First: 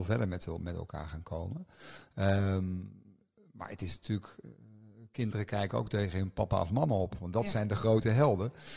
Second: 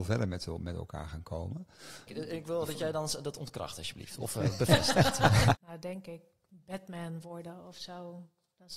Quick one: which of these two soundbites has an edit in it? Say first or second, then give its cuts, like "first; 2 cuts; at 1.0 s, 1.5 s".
second; 2 cuts; at 2.1 s, 5.5 s